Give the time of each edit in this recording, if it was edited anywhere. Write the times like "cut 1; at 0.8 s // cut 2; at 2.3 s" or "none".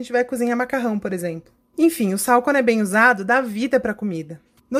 none